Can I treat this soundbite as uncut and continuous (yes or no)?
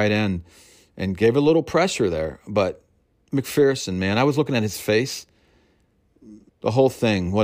no